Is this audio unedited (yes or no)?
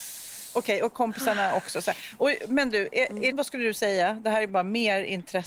no